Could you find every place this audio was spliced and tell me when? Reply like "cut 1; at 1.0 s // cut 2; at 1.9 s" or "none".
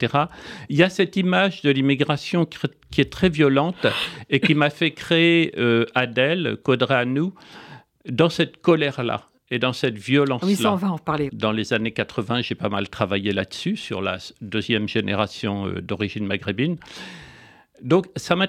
cut 1; at 11.3 s

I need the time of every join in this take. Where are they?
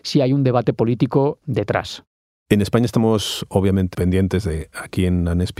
cut 1; at 1.4 s // cut 2; at 3.9 s

